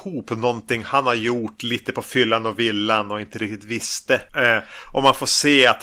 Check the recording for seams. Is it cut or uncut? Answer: cut